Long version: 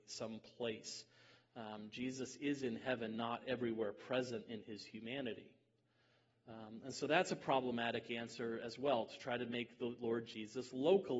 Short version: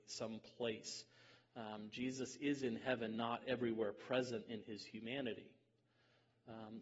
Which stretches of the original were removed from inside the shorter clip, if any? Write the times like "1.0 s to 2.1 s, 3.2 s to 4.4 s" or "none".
none